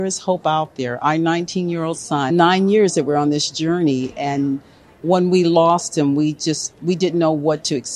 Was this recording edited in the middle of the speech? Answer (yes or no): yes